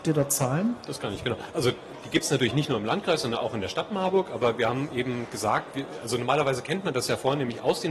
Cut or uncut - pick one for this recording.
uncut